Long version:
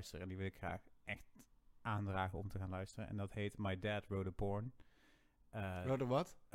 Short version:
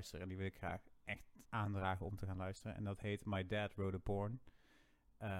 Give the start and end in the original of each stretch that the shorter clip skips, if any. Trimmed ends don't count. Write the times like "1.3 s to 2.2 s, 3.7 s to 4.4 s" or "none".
1.4 s to 1.8 s

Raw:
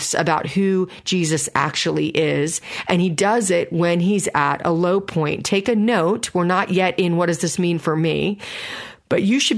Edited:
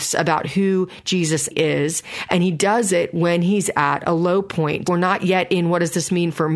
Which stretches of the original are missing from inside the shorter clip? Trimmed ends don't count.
1.5 s to 2.1 s, 5.4 s to 6.3 s

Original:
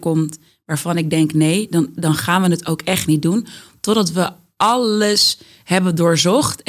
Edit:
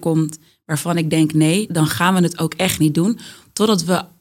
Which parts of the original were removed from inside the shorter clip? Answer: 1.7 s to 2.0 s

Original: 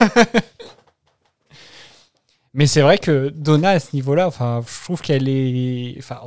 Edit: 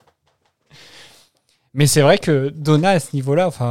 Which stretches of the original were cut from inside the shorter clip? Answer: none

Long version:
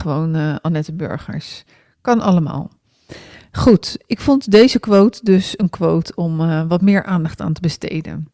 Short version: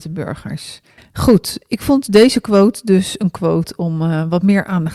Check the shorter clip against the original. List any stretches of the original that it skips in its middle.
1.8 s to 3.4 s

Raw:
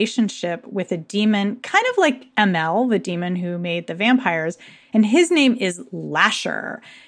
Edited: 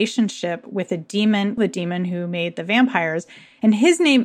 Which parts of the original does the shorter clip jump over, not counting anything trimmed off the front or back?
1.6 s to 2.9 s

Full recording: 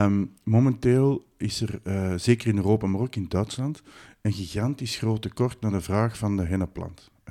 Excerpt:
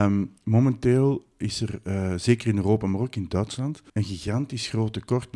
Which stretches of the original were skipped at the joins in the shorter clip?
3.9 s to 4.2 s

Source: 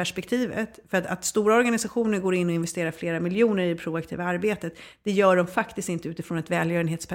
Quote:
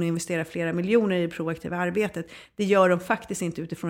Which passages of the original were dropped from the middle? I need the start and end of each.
none

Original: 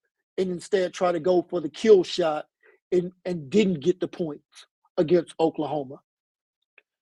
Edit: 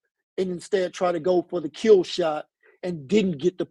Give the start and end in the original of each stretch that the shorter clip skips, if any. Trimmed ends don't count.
2.8 s to 3.2 s

